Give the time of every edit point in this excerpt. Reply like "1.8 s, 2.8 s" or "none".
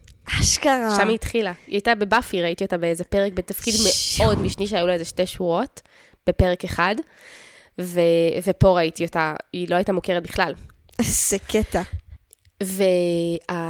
none